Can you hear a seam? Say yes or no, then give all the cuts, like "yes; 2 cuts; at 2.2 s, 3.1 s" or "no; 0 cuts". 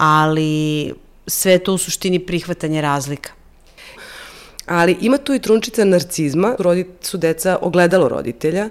yes; 2 cuts; at 4.0 s, 6.6 s